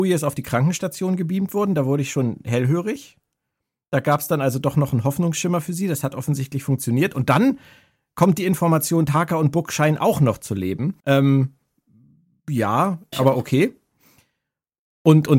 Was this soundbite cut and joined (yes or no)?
yes